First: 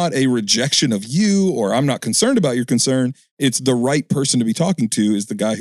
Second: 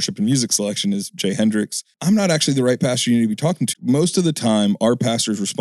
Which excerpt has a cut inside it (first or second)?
second